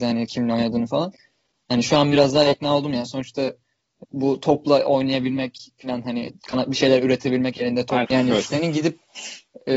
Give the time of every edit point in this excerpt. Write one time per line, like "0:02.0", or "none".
0:04.0
0:08.0